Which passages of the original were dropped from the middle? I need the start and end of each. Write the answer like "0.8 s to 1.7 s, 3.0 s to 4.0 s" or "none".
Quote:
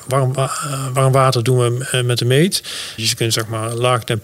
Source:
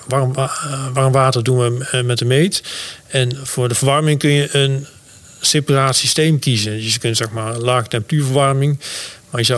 3.0 s to 6.8 s